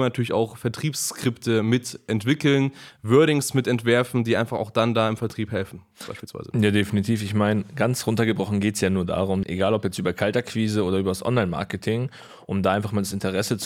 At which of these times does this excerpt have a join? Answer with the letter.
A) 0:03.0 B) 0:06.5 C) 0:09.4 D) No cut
C